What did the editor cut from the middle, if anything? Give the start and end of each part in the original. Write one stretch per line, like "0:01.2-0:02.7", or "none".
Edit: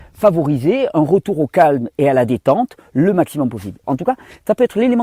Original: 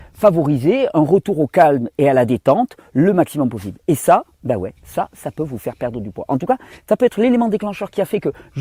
0:03.8-0:06.3